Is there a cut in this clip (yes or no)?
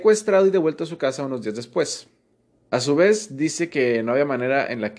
yes